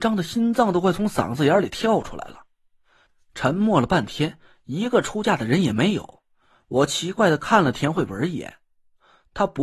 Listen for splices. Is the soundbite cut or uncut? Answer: uncut